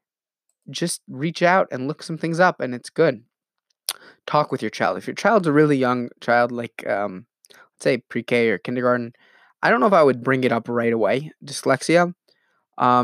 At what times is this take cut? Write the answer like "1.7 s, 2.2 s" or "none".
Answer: none